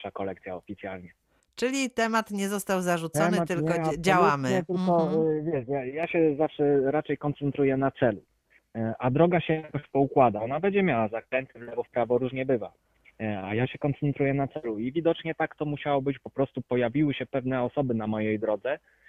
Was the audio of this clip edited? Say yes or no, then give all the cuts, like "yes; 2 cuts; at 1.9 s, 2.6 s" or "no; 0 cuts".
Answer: no; 0 cuts